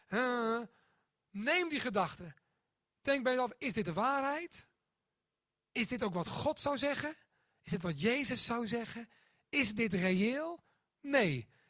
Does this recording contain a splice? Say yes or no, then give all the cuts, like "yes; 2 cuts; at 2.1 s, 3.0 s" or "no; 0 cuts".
no; 0 cuts